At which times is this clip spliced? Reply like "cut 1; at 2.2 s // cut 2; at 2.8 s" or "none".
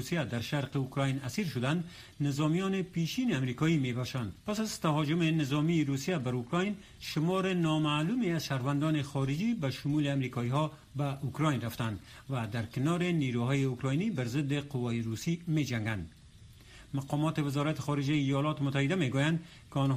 cut 1; at 4.4 s